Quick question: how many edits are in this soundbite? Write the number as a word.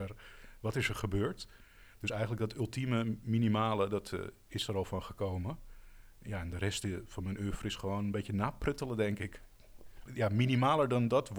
one